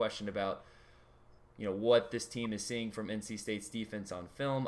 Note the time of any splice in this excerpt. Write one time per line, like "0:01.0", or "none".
none